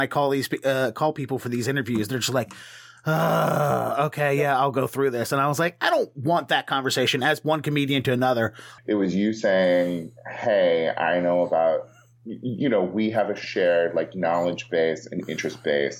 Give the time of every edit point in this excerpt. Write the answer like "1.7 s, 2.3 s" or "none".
8.8 s

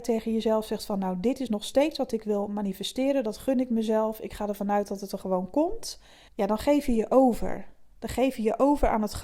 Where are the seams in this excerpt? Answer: 6.3 s

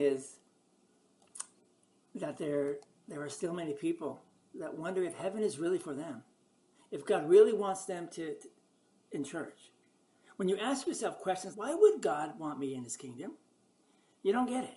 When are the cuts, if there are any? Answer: 11.5 s

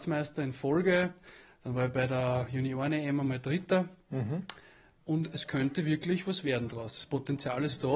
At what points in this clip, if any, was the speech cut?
5.0 s

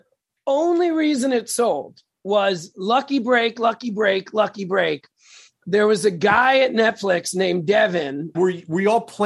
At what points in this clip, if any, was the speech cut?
2.7 s, 8.3 s

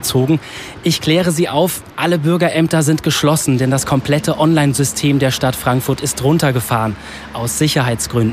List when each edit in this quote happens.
none

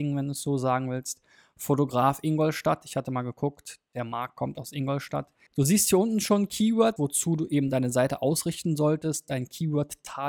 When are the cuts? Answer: 5.5 s, 7.0 s

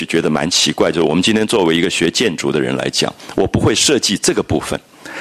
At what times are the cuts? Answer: none

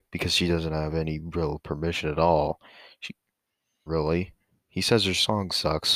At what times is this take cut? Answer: 3.9 s

